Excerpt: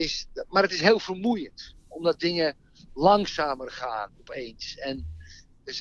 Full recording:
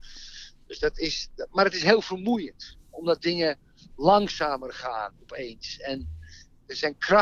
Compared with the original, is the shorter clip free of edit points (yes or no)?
yes